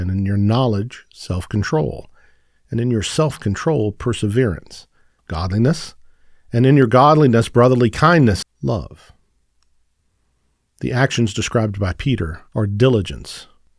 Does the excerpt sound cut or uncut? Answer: cut